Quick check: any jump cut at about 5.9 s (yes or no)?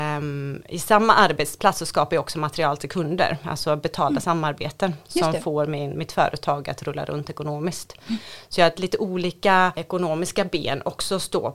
yes